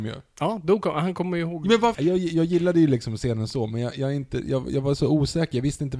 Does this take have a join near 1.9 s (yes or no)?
yes